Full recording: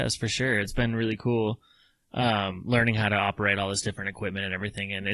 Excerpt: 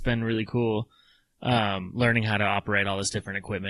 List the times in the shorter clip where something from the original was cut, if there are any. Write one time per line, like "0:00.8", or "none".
none